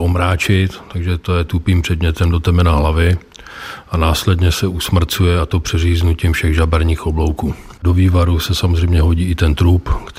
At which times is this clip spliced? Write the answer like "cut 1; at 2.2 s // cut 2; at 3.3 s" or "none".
cut 1; at 7.8 s